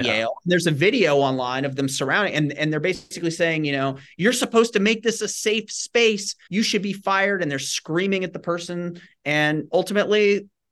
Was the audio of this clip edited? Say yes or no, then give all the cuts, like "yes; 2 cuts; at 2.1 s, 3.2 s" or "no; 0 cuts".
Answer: yes; 1 cut; at 6.5 s